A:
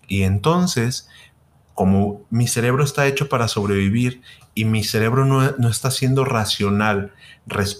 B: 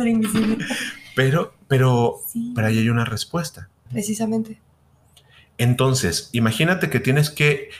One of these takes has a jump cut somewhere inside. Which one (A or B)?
B